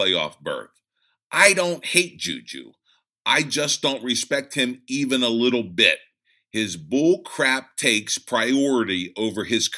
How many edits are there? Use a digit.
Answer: 0